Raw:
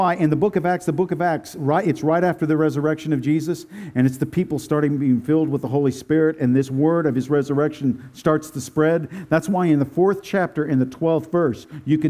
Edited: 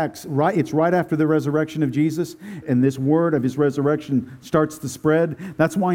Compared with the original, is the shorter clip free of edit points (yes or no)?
no